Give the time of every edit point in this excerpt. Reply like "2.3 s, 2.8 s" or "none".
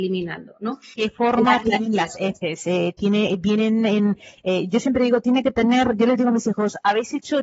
0.9 s